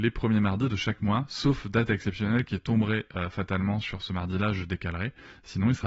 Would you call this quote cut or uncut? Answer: uncut